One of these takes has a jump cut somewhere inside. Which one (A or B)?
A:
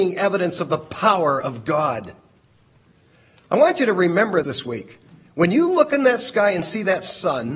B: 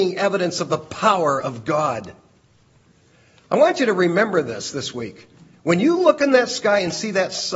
A